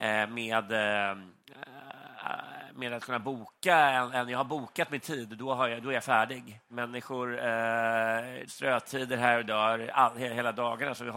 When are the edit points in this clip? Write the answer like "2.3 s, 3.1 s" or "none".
6.7 s, 8.5 s